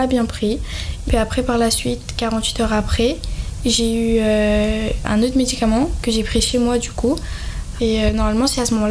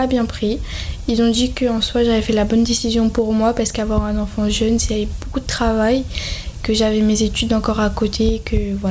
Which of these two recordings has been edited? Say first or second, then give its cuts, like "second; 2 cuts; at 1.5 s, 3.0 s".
first; 2 cuts; at 1.1 s, 7.8 s